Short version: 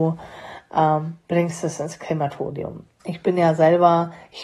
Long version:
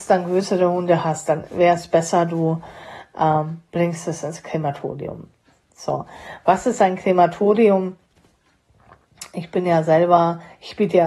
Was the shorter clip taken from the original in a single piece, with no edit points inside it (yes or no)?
no